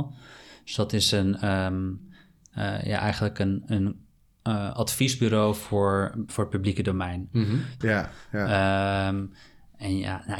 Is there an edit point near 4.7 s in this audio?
no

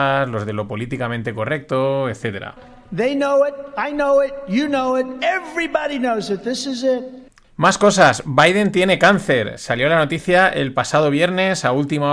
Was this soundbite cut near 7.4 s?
yes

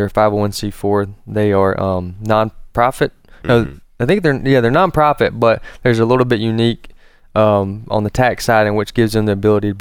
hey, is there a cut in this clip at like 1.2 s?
no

